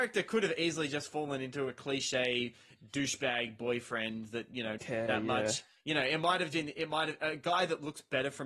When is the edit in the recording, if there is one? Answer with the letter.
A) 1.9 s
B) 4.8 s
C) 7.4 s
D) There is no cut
B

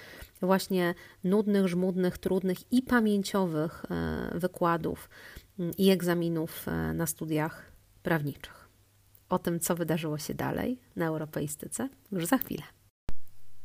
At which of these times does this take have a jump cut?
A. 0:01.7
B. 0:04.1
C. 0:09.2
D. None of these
D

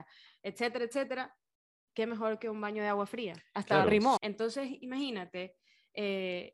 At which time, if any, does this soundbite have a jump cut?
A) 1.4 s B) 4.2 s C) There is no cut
B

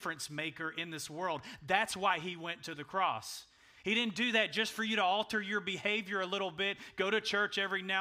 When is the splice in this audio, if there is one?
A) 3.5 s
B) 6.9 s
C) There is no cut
C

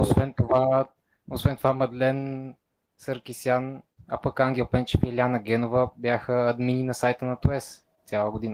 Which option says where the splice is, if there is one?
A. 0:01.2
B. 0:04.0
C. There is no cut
B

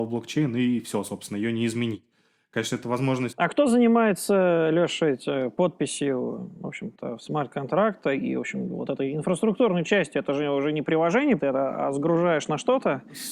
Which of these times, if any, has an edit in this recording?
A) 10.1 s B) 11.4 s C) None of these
B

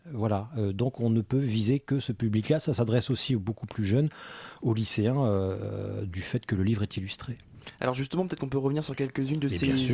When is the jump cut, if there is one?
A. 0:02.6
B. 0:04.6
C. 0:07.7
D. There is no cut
D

